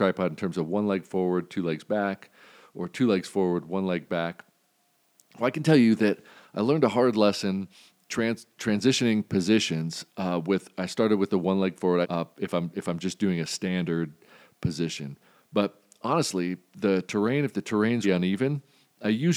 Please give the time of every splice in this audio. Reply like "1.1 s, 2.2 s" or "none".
12.0 s, 18.0 s